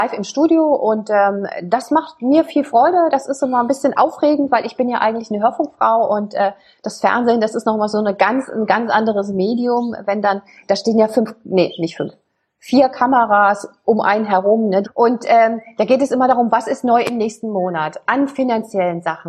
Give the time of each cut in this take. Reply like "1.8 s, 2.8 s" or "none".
14.8 s